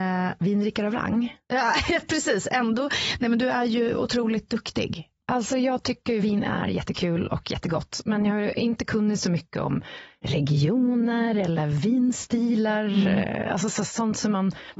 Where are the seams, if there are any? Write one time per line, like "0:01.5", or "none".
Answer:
none